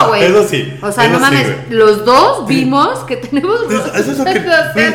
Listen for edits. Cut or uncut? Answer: uncut